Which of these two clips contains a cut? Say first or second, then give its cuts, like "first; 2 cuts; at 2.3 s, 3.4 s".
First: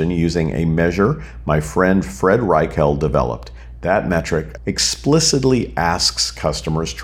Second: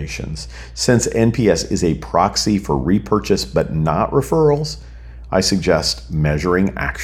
first; 1 cut; at 4.6 s